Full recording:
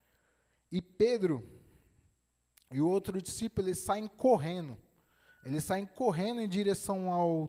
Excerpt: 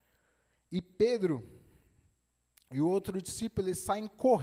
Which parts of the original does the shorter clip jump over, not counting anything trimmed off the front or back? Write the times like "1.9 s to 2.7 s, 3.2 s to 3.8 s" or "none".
none